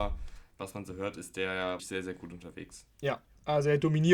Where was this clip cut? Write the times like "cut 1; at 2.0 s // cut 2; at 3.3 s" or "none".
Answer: cut 1; at 1.8 s